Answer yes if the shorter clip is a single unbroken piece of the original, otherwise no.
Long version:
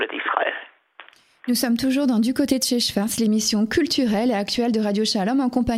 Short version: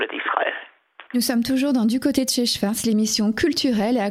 no